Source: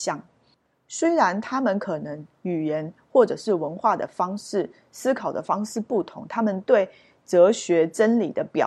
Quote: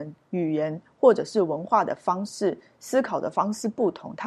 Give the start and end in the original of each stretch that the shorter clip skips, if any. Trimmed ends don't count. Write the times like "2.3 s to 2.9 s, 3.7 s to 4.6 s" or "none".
none